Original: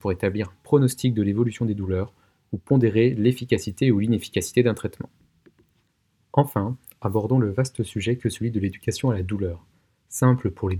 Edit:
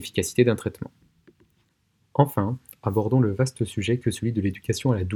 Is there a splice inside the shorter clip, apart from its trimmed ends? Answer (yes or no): no